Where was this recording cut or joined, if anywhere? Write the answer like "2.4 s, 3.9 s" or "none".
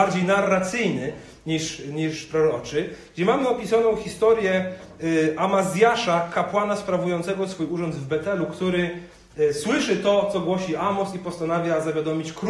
none